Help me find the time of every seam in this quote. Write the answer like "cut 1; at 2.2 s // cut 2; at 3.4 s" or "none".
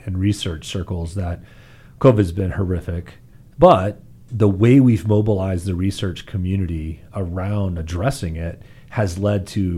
cut 1; at 3.5 s